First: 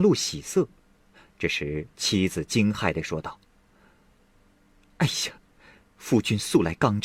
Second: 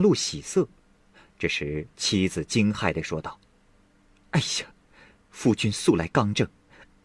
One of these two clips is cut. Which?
second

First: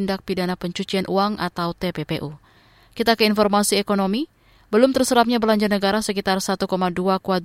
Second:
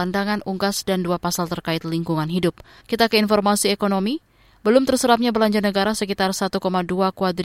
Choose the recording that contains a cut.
second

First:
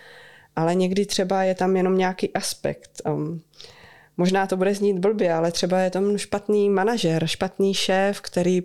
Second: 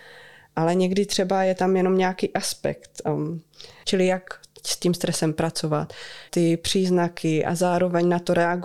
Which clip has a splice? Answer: second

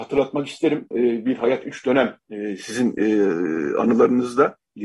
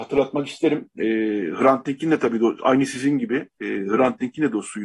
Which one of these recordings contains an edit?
first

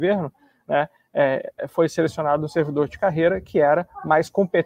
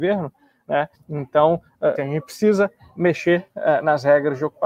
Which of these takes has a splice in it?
second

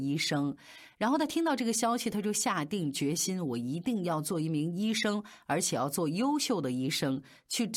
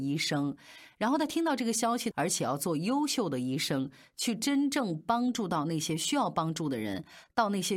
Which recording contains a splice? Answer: second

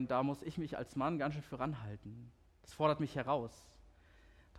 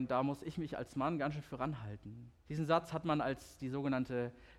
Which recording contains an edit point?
second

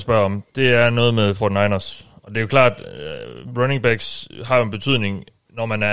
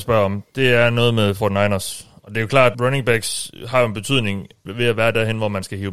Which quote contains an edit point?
second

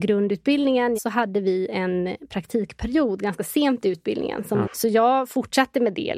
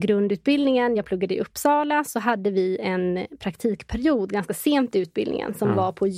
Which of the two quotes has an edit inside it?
first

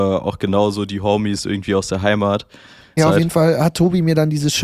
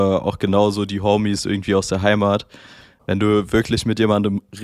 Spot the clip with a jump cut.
first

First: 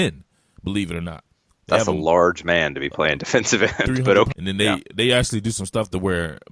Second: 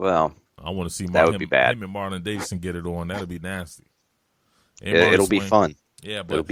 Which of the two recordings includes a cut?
first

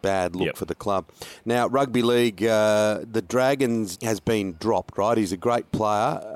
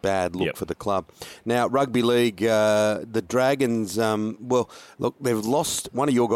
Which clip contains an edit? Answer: first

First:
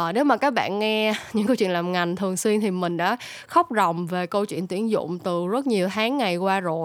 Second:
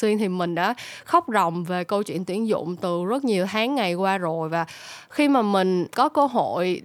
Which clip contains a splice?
second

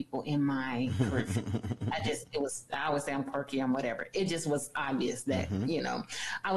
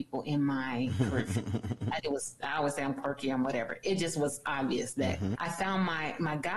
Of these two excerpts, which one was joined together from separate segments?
second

